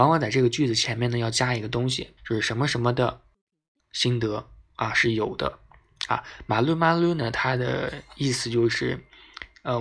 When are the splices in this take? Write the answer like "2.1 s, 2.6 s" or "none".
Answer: 2.2 s